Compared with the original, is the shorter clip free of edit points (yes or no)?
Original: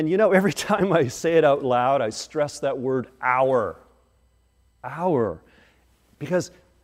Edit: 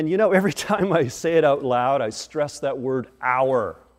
yes